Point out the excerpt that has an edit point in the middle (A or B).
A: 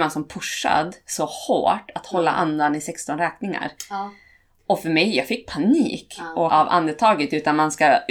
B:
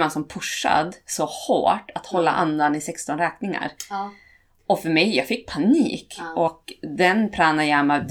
A